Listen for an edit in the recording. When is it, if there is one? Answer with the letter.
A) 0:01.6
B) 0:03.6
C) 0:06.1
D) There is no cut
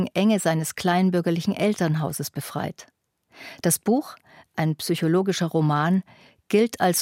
D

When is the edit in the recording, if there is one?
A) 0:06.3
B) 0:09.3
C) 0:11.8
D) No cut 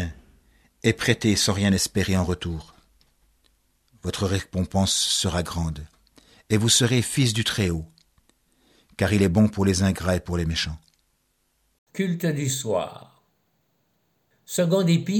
C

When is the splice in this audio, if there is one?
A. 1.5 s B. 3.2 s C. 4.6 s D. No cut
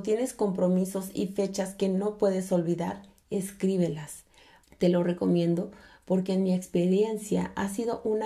C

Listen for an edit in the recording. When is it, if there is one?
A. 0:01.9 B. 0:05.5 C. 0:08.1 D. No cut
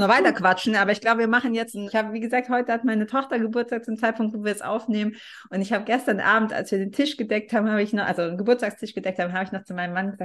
A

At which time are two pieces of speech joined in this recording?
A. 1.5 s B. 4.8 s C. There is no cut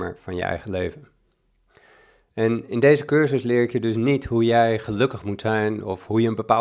C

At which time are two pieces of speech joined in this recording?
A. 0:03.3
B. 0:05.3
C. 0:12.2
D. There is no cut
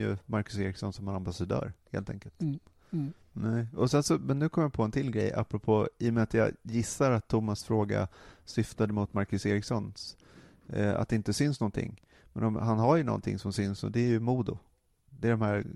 A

